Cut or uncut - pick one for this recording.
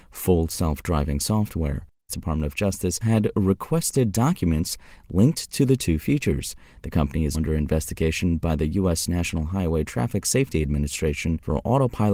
cut